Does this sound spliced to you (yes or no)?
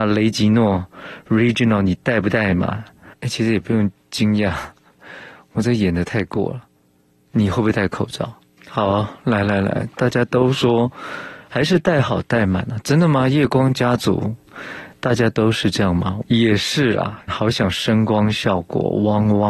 yes